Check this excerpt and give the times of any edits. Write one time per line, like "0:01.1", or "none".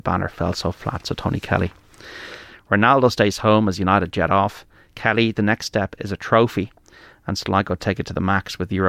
0:02.5